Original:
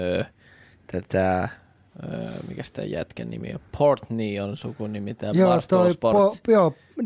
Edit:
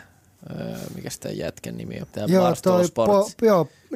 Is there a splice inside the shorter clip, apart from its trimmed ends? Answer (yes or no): yes